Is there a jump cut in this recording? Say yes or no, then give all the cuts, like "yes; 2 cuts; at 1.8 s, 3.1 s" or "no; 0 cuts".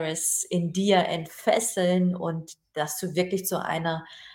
no; 0 cuts